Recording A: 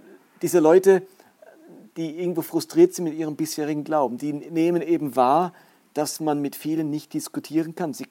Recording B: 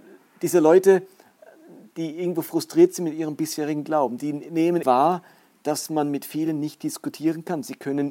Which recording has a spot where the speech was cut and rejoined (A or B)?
B